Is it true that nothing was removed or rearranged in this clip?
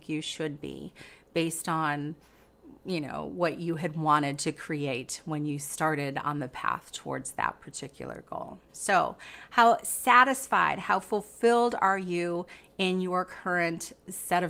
no; 1 cut; at 8.7 s

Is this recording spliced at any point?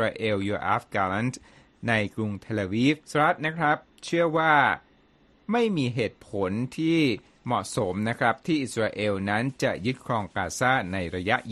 yes; 1 cut; at 3.0 s

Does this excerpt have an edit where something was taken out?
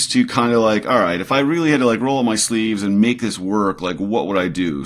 no; 0 cuts

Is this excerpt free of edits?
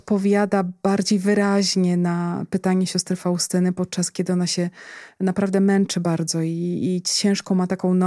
yes; 0 cuts

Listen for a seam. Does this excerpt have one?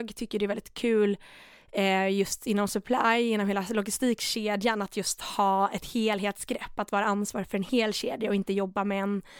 no; 0 cuts

